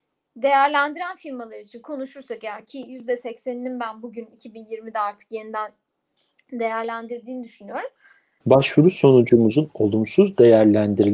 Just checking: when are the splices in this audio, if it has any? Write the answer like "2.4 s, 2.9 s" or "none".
8.4 s